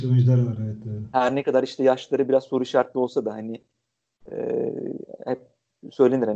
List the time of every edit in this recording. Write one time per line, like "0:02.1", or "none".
none